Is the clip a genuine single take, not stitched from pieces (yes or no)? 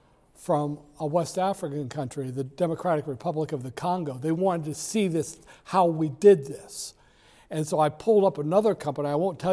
yes